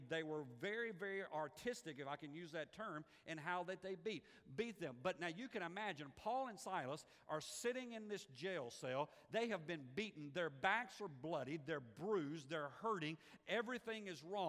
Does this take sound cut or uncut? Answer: uncut